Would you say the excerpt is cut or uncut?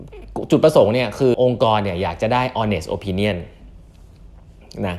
cut